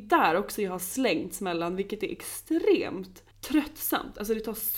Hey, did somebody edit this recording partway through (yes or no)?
yes